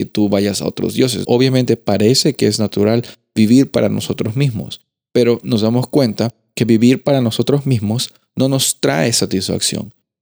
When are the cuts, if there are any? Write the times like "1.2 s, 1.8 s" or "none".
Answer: 1.2 s